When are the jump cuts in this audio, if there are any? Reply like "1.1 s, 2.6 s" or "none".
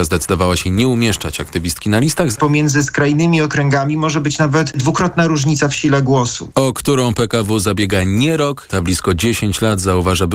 2.3 s, 6.5 s, 8.7 s